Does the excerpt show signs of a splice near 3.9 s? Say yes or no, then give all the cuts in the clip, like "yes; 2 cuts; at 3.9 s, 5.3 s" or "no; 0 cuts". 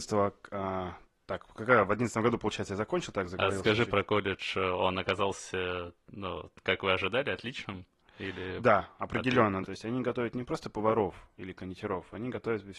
no; 1 cut; at 9.6 s